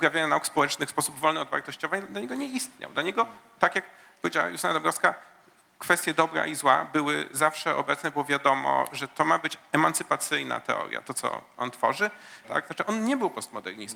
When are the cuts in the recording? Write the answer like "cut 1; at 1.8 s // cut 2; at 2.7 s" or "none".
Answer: cut 1; at 12.4 s